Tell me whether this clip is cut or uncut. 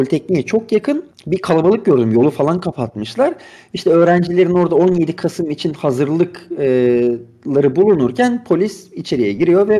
uncut